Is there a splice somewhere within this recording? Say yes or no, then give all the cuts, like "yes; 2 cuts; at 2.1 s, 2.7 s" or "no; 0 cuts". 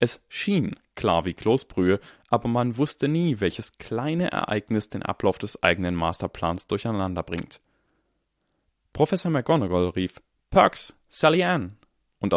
no; 0 cuts